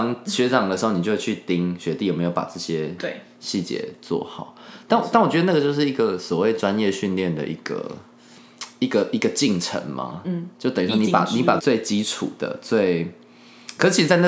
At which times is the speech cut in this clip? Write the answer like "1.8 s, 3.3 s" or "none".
11.6 s